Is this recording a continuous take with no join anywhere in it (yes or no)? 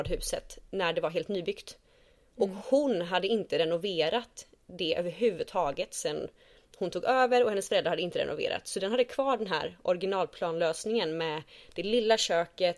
yes